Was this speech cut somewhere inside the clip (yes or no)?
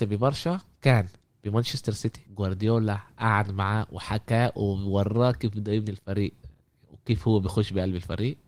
yes